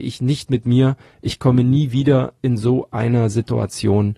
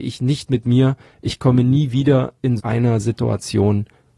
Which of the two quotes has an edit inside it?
second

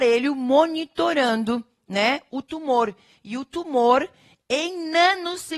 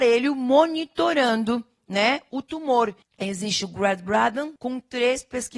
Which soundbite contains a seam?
second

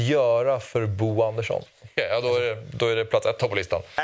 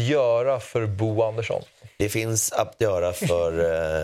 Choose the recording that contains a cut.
first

